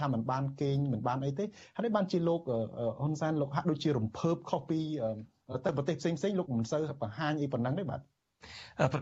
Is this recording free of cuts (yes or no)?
no